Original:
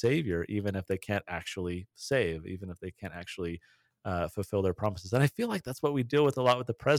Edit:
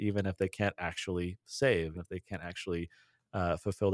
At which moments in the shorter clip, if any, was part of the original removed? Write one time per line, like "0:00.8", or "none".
0:01.9

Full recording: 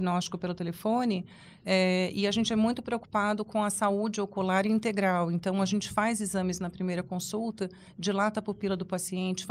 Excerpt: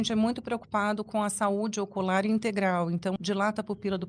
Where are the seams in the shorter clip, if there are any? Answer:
0:03.2

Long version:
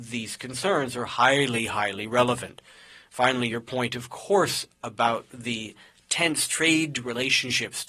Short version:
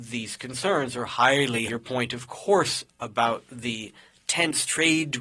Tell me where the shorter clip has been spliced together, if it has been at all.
0:01.7

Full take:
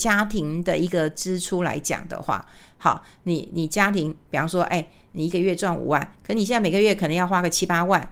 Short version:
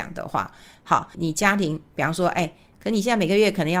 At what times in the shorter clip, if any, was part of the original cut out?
0:01.1
0:02.7

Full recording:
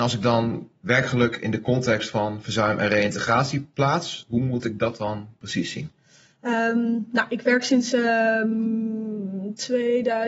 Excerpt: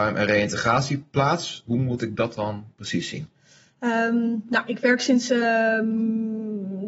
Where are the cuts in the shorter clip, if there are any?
none

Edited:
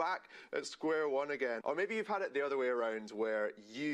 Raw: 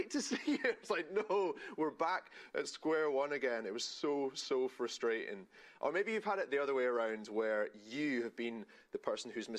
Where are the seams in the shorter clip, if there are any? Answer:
0:01.6

